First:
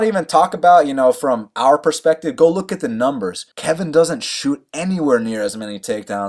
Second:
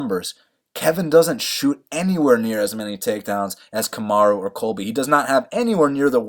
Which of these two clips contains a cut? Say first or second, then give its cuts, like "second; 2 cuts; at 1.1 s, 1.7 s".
first; 1 cut; at 3.5 s